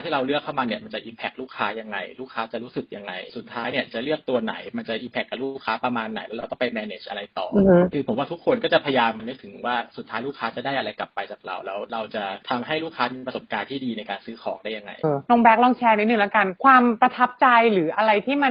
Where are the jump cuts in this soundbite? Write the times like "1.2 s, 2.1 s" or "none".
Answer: 15.0 s